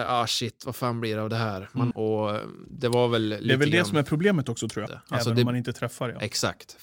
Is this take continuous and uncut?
no; 2 cuts; at 1.9 s, 4.9 s

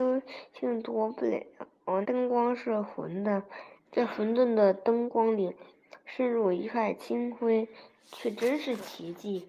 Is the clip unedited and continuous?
no; 2 cuts; at 2.0 s, 3.8 s

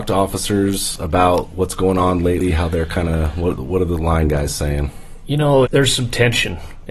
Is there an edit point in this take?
yes; 1 cut; at 5.6 s

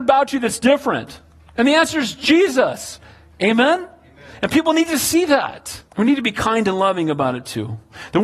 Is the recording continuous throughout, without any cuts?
no; 1 cut; at 5.9 s

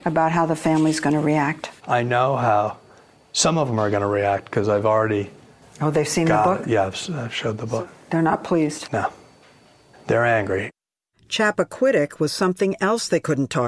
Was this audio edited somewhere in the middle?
yes; 1 cut; at 9.9 s

